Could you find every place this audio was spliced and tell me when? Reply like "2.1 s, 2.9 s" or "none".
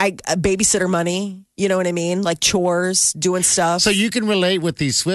none